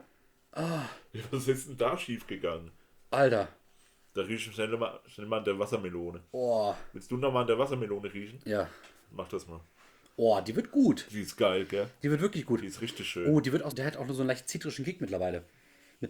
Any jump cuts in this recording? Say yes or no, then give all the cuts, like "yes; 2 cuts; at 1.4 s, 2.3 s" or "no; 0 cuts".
yes; 1 cut; at 13.7 s